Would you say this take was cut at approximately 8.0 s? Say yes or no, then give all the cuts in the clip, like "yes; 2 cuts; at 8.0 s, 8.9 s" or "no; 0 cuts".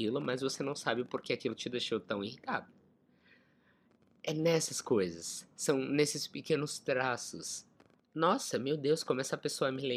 yes; 1 cut; at 8.0 s